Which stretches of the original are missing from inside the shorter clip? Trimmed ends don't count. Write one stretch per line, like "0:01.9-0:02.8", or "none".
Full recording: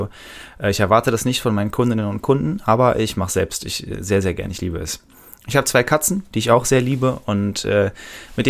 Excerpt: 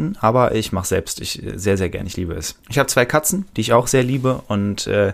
0:05.1-0:05.4